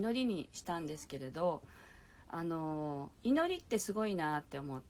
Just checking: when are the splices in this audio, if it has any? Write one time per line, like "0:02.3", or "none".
0:03.2